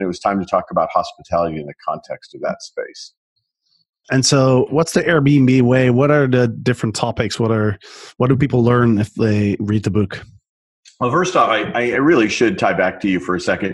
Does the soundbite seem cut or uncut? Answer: uncut